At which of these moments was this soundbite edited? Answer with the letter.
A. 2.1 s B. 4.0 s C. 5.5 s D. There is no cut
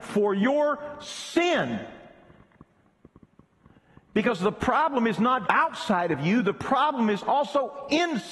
C